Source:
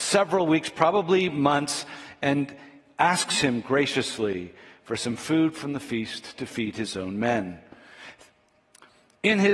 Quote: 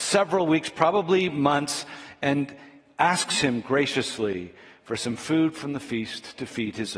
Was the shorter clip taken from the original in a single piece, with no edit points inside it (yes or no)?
yes